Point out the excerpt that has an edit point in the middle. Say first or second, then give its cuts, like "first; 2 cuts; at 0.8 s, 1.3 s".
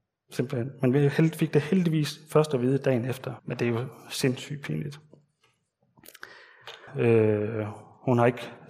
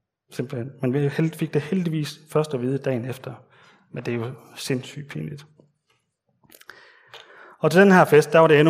first; 2 cuts; at 3.4 s, 6.9 s